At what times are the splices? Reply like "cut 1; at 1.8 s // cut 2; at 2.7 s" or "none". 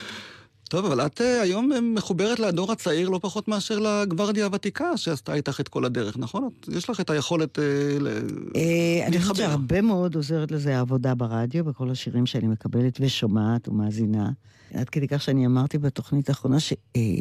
cut 1; at 14.7 s